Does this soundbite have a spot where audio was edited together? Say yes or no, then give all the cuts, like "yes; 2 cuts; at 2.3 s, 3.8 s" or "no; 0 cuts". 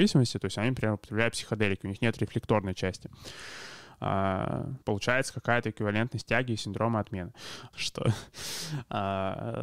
yes; 2 cuts; at 4.8 s, 7.7 s